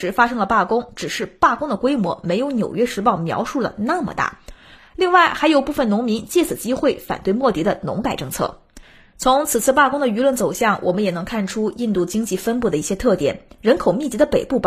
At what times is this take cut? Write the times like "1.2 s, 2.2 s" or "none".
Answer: 4.8 s